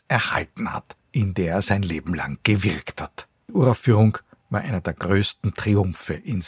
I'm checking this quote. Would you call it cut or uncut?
cut